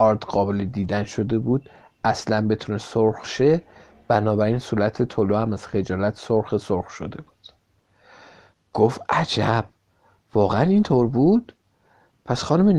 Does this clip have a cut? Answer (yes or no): no